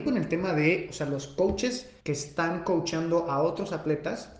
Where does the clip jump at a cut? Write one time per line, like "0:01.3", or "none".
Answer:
0:02.0